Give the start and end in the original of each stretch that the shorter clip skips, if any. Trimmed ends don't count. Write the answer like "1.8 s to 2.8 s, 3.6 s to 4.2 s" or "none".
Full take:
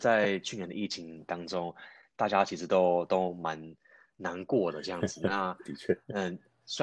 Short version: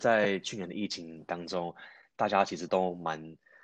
2.7 s to 3.1 s